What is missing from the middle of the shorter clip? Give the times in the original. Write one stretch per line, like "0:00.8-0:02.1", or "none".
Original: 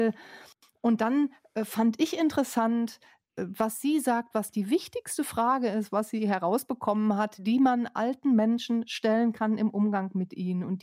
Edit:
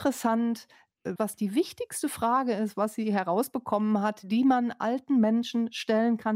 0:03.5-0:04.3